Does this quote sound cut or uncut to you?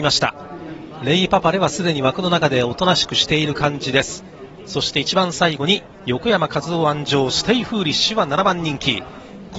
cut